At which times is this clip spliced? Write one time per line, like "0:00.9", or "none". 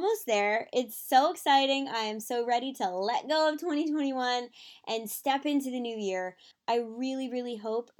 0:06.5